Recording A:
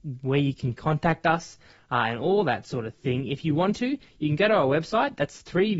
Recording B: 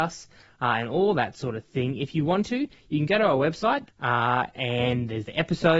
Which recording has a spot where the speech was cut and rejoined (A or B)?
B